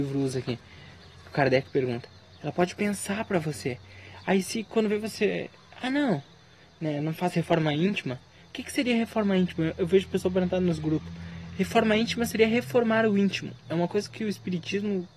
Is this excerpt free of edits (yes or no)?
yes